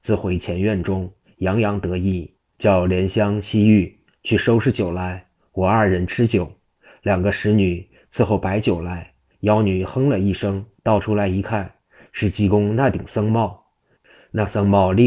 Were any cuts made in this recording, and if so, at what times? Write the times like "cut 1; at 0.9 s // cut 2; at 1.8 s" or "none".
cut 1; at 9.3 s // cut 2; at 10.8 s // cut 3; at 14.0 s